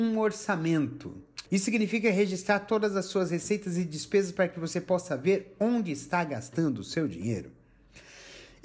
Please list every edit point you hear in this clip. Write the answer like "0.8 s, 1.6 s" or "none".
1.5 s